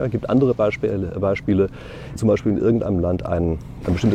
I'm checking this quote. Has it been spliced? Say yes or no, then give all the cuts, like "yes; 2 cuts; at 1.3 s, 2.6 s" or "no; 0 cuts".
yes; 1 cut; at 2.2 s